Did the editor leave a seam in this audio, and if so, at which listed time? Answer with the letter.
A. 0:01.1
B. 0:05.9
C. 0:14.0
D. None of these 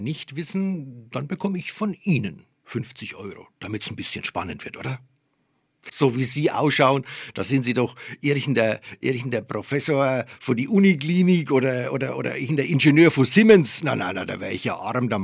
B